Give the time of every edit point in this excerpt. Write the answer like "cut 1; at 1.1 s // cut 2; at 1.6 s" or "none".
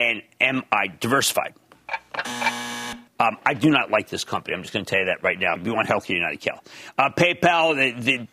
cut 1; at 3.1 s // cut 2; at 5.6 s